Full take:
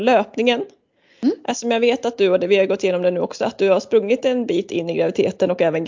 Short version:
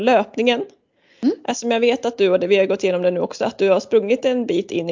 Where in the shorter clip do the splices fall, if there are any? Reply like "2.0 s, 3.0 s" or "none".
none